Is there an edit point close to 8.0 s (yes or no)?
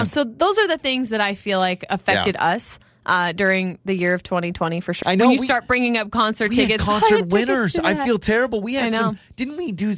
no